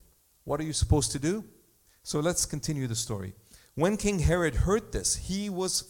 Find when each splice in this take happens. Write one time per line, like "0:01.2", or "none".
0:01.9